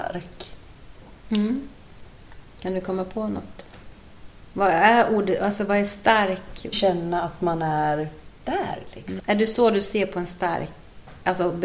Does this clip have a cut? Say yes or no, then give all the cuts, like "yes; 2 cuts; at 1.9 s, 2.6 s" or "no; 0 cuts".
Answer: yes; 2 cuts; at 6.7 s, 9.2 s